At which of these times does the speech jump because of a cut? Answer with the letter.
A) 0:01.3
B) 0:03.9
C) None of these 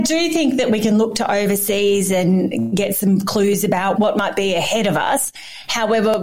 B